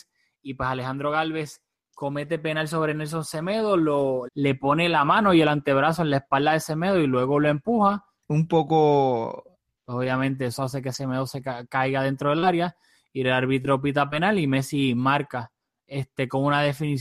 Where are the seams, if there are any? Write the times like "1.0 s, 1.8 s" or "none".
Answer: 4.3 s, 8.2 s, 9.8 s